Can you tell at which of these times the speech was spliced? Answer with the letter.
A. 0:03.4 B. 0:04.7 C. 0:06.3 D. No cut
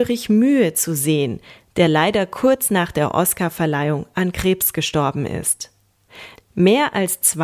C